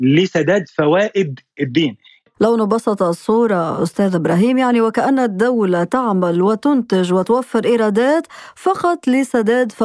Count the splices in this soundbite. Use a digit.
0